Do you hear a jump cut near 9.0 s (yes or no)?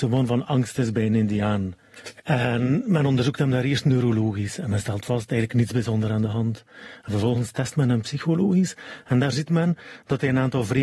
no